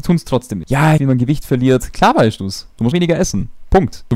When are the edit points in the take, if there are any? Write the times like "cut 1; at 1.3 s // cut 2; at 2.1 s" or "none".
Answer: cut 1; at 1.0 s // cut 2; at 2.9 s